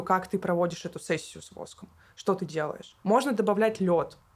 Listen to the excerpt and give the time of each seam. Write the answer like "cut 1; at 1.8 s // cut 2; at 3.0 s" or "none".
cut 1; at 3.0 s